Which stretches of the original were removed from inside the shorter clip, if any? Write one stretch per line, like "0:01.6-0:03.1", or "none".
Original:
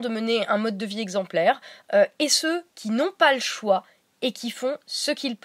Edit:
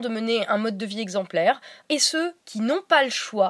0:01.8-0:02.1

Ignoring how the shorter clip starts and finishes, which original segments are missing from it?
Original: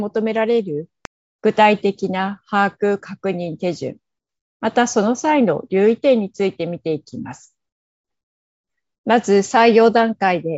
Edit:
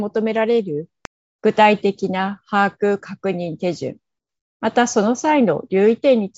none

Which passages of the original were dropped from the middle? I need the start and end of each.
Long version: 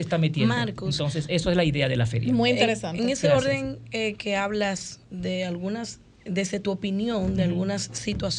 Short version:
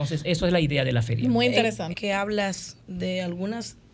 0:03.0-0:04.2

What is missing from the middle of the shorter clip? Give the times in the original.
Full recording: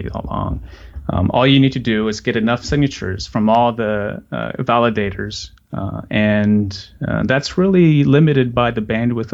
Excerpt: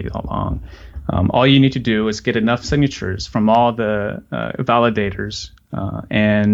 none

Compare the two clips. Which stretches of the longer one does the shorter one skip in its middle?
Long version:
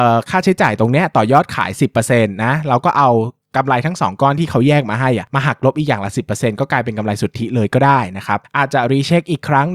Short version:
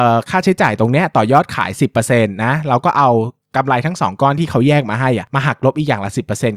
none

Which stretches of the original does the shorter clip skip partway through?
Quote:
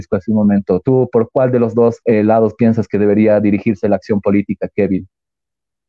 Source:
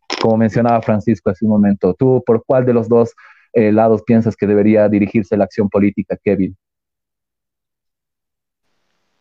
0:03.2-0:03.5

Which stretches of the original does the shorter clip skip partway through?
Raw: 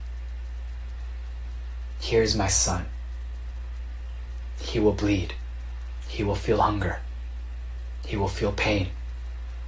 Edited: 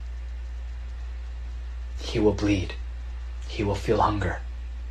0:01.9-0:04.5

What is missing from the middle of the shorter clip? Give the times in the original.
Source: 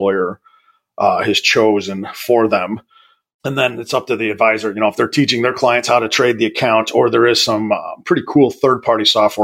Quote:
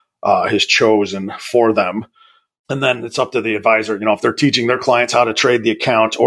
none

